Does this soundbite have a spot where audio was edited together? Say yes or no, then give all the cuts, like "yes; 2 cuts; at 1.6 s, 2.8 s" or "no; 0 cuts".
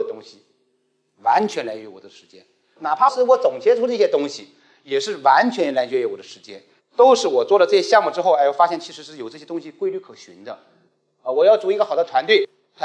yes; 1 cut; at 6.8 s